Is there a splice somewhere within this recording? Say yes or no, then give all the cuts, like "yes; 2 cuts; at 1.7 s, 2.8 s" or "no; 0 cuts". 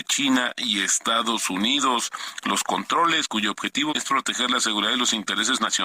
yes; 1 cut; at 3.9 s